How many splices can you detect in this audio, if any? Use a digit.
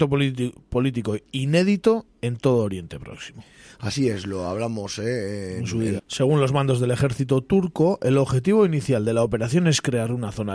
1